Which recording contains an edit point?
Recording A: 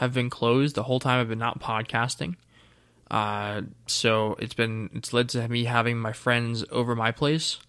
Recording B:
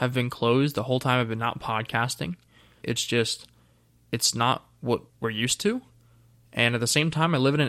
B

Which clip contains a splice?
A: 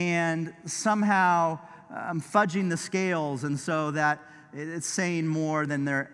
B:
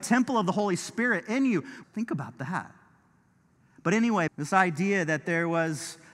B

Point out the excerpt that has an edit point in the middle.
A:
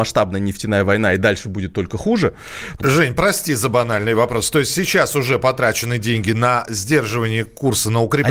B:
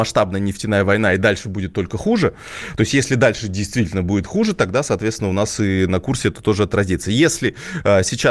A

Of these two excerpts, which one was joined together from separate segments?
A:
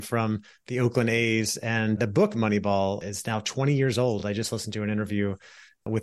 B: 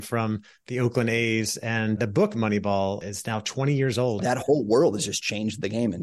B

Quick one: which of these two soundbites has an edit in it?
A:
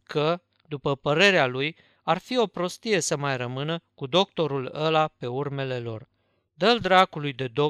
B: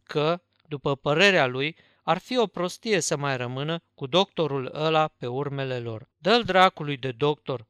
B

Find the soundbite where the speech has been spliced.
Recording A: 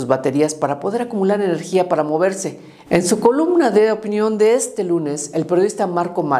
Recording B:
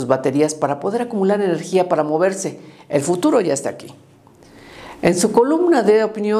A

